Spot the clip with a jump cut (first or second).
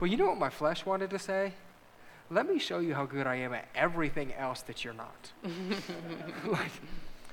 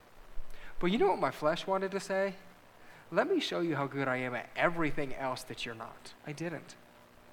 second